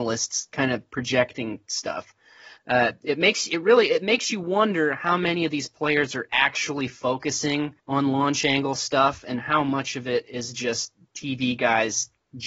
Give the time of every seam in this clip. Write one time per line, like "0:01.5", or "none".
0:02.6
0:07.8